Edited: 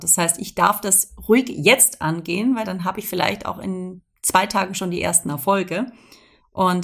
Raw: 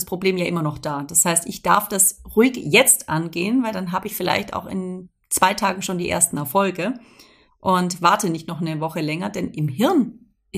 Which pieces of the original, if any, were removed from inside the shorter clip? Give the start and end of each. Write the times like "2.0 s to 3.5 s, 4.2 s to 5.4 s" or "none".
none